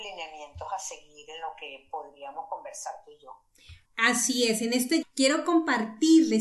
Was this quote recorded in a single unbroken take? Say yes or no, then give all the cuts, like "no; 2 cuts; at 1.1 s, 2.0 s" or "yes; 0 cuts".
no; 2 cuts; at 3.8 s, 5.0 s